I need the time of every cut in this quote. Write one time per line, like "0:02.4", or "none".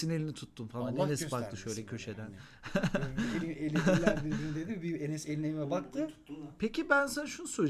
none